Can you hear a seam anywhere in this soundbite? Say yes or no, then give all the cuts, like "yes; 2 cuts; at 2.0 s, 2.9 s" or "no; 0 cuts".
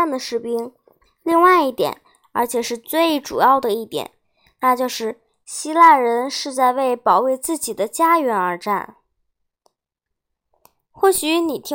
no; 0 cuts